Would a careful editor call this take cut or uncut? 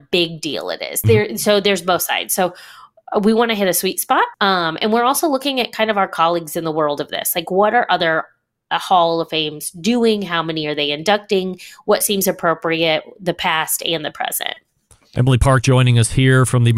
cut